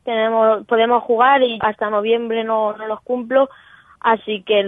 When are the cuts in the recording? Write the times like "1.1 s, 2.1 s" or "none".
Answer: 1.6 s